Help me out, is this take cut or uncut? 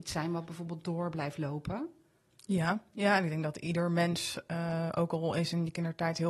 uncut